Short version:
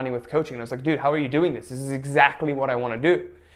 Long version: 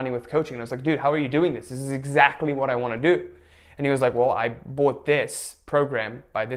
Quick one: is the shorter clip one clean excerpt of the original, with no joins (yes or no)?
yes